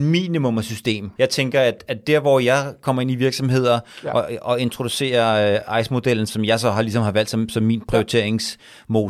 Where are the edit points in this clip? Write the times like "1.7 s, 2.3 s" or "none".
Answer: 1.2 s, 6.3 s